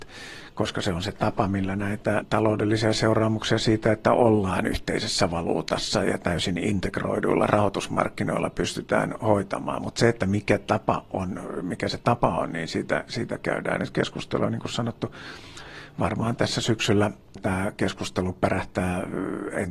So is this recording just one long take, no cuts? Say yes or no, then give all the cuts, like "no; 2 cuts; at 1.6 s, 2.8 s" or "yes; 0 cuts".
yes; 0 cuts